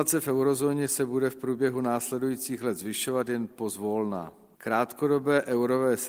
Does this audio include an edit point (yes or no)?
yes